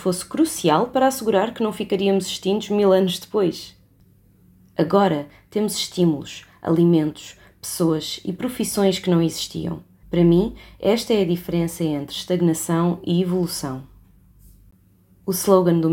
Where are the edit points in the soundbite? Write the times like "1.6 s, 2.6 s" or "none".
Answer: 10.0 s